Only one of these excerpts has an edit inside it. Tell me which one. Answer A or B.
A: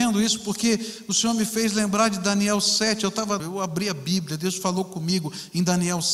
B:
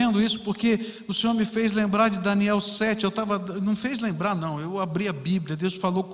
A